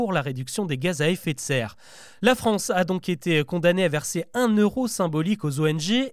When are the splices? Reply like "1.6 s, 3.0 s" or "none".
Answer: none